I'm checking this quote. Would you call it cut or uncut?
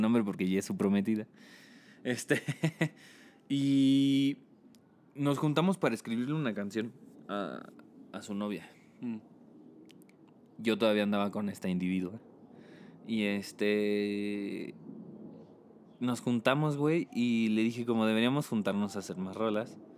uncut